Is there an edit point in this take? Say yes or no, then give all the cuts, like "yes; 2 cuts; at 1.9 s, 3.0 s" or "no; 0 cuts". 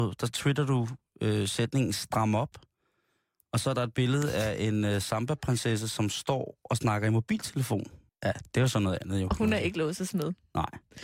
yes; 1 cut; at 8.1 s